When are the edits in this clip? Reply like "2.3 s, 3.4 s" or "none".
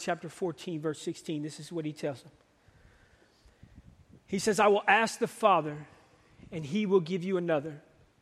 none